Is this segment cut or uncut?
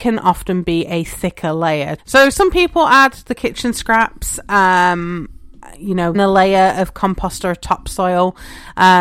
cut